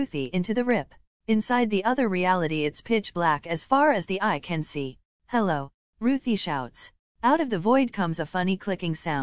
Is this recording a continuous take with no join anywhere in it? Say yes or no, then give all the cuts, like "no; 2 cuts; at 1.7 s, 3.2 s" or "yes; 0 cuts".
yes; 0 cuts